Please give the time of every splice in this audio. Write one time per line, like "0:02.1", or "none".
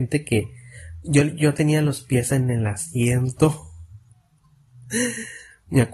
none